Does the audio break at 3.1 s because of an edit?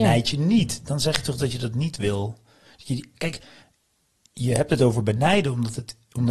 no; 0 cuts

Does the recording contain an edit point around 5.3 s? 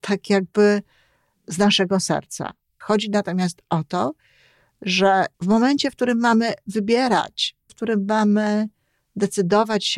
yes; 3 cuts; at 2.8 s, 5.3 s, 7.7 s

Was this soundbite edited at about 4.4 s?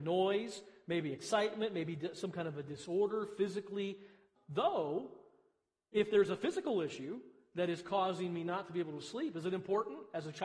yes; 1 cut; at 4.4 s

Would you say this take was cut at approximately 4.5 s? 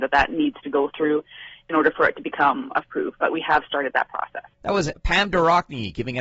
yes; 1 cut; at 4.5 s

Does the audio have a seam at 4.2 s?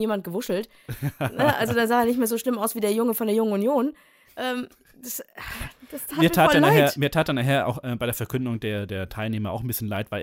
no; 0 cuts

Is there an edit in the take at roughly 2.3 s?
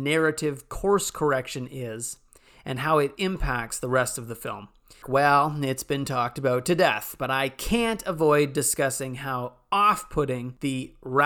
no; 1 cut; at 5.0 s

